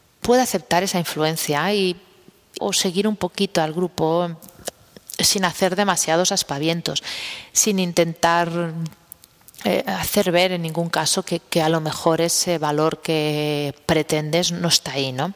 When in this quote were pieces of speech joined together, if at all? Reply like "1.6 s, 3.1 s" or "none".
2.6 s